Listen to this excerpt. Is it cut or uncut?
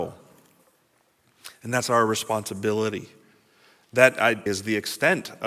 cut